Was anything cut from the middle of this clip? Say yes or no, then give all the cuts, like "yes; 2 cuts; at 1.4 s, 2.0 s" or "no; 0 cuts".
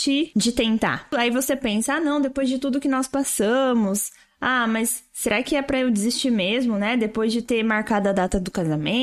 no; 0 cuts